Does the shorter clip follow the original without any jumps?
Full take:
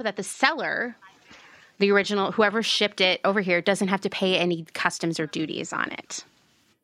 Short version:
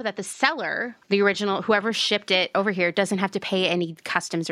no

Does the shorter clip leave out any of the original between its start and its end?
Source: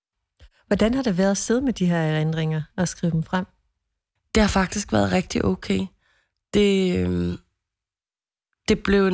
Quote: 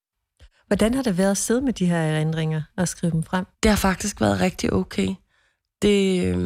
yes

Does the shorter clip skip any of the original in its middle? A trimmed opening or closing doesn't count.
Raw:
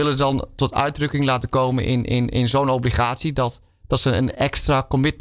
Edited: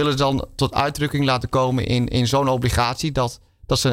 yes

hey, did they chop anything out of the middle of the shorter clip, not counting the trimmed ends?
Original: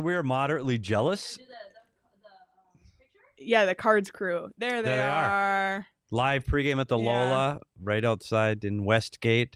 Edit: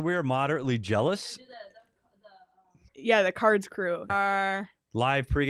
yes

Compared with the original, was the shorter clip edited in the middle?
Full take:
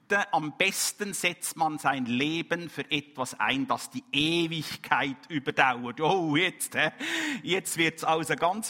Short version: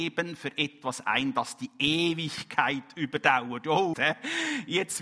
yes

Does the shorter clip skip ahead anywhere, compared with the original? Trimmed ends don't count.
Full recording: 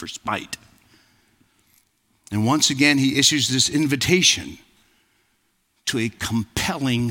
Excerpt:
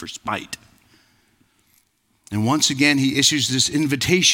no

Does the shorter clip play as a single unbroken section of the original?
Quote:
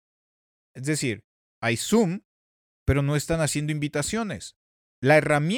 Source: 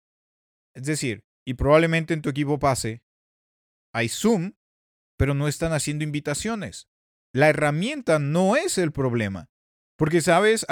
no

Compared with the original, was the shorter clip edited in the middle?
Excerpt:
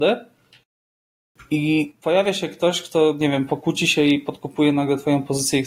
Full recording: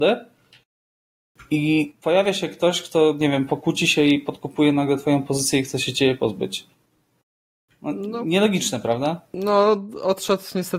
no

